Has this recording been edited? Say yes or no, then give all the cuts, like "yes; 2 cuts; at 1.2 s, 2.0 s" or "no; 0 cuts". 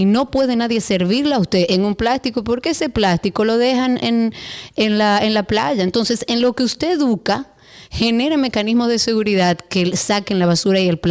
no; 0 cuts